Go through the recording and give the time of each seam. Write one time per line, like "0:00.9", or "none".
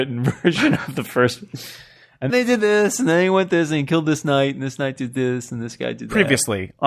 0:02.3